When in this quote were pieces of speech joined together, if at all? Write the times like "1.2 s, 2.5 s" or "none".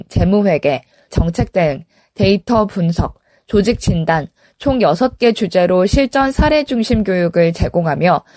1.1 s